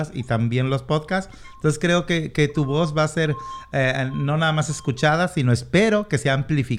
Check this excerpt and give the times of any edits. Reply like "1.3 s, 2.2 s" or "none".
none